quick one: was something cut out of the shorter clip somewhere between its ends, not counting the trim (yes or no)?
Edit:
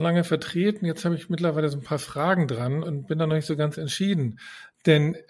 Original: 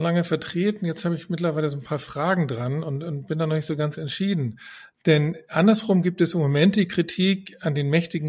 yes